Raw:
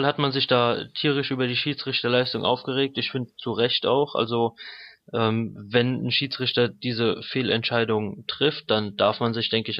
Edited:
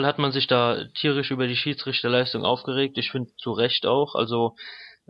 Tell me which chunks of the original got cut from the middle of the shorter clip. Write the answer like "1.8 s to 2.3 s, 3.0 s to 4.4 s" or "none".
none